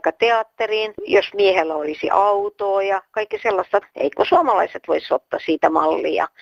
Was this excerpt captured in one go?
no; 1 cut; at 3.8 s

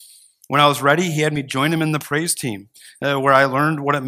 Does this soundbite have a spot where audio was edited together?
no; 0 cuts

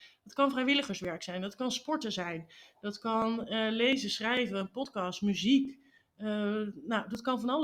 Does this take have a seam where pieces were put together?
no; 0 cuts

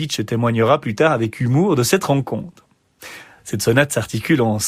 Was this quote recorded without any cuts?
no; 1 cut; at 3.4 s

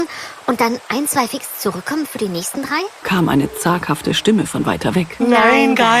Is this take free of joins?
no; 1 cut; at 3.0 s

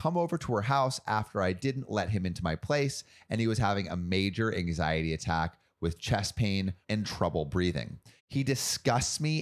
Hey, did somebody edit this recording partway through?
yes; 2 cuts; at 6.8 s, 8.2 s

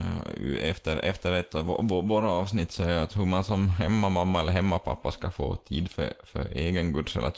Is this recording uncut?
yes; 0 cuts

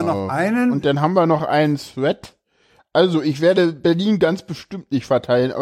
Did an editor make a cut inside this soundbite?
yes; 1 cut; at 2.8 s

